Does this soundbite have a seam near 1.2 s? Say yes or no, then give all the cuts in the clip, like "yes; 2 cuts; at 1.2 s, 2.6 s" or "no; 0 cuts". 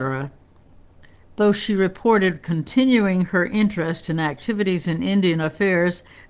yes; 1 cut; at 1.2 s